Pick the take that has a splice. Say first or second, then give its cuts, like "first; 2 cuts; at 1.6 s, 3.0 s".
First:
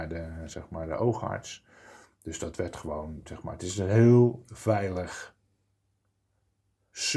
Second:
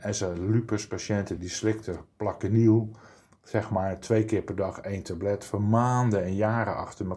second; 1 cut; at 1.4 s